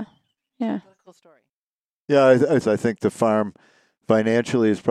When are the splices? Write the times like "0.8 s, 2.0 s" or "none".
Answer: 2.6 s